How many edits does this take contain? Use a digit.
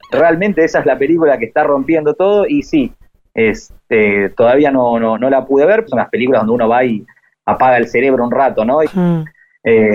2